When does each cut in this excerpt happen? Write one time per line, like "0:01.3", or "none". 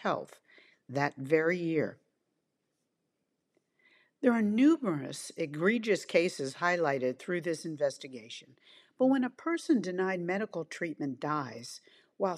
none